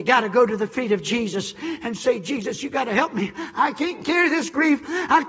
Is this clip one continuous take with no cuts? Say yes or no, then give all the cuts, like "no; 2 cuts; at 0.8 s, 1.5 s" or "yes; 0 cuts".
yes; 0 cuts